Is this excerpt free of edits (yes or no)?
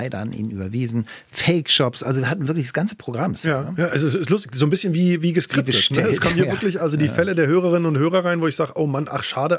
yes